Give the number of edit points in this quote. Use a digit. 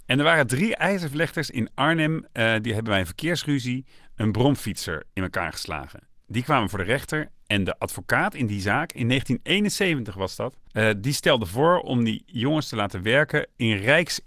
1